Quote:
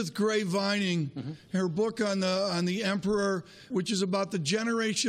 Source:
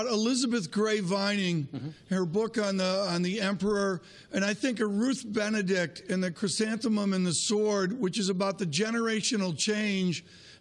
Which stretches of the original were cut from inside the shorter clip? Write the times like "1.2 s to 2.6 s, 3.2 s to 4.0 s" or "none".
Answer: 4.3 s to 8.0 s